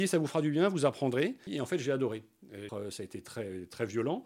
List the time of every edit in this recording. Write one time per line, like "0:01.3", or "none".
0:01.5
0:02.7